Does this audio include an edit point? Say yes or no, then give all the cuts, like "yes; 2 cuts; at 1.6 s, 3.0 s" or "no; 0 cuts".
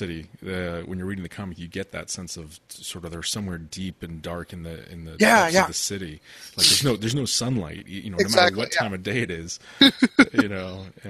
no; 0 cuts